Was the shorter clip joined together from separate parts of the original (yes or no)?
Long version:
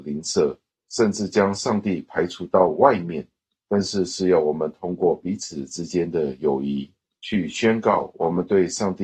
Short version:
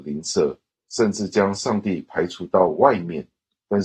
no